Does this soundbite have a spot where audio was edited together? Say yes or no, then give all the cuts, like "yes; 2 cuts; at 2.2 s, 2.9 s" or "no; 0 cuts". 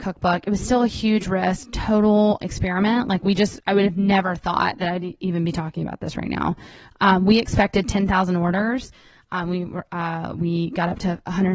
yes; 1 cut; at 2.4 s